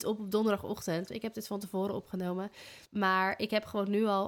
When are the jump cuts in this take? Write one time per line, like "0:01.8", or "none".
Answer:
0:02.9